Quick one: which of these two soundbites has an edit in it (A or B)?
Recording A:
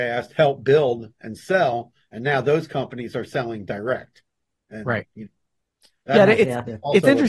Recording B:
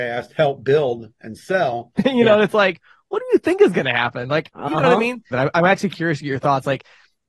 B